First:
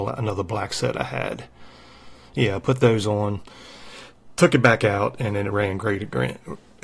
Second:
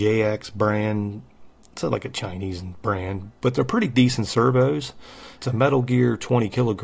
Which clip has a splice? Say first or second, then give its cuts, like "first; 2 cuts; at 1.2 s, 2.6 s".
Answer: second; 1 cut; at 5.4 s